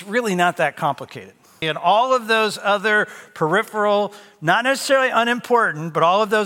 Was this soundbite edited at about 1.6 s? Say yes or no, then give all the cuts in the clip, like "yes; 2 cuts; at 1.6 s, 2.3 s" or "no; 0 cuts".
yes; 1 cut; at 1.6 s